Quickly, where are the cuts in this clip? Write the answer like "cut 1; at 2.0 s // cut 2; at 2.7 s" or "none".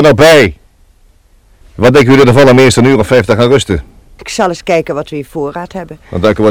cut 1; at 1.6 s // cut 2; at 4.2 s